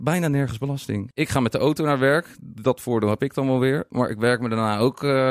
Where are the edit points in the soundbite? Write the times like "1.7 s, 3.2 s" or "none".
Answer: 1.1 s